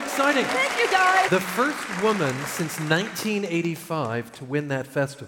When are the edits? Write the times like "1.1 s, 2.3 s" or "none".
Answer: 1.3 s